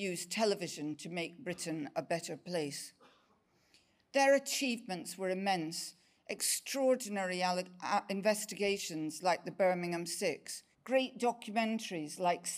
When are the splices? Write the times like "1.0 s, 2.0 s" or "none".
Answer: 10.7 s